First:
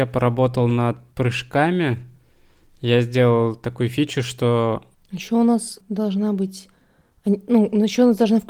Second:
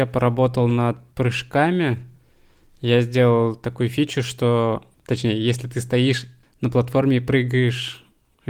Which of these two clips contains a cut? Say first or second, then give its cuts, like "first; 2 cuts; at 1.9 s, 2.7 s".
first; 1 cut; at 4.9 s